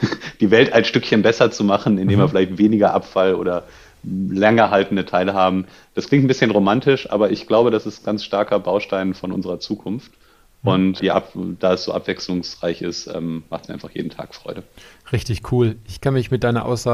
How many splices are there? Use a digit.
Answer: 2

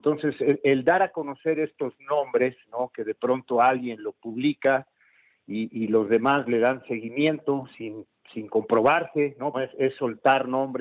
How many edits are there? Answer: 1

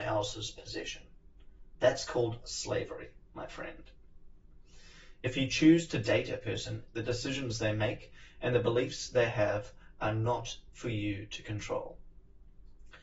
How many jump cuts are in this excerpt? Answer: 1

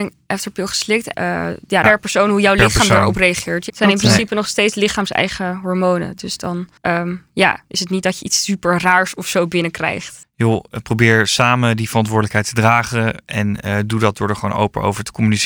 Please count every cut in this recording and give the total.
3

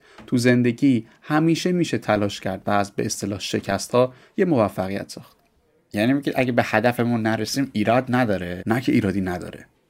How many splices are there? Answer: 1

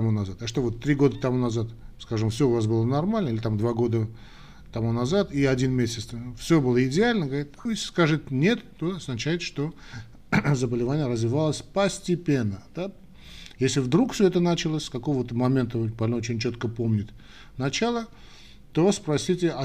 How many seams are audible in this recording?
1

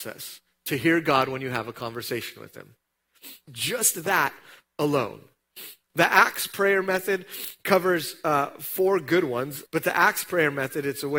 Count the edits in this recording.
3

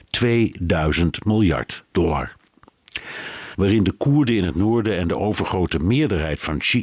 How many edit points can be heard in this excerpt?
1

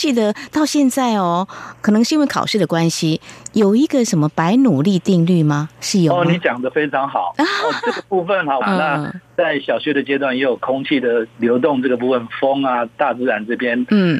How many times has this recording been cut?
2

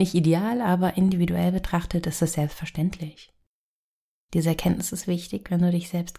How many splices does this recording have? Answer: 1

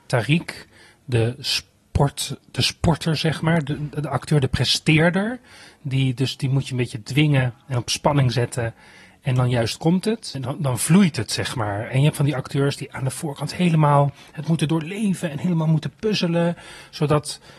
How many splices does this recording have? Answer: 1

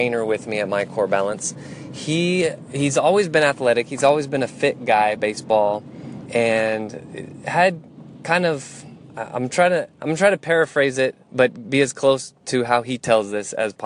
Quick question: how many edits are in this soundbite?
2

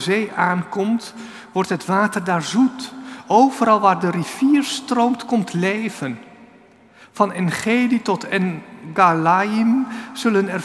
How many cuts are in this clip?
0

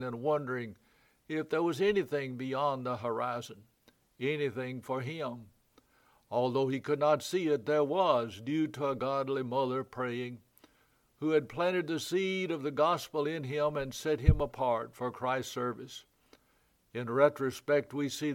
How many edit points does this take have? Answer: 0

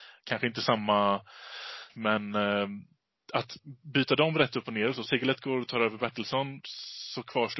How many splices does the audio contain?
1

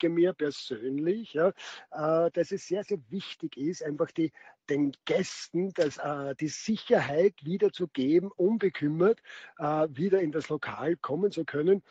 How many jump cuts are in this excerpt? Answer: 0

